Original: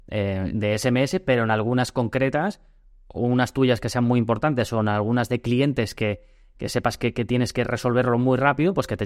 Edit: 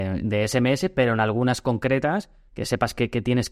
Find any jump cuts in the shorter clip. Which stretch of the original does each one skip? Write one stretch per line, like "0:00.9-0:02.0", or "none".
0:02.8-0:06.5